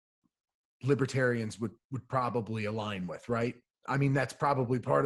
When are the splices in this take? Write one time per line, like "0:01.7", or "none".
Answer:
none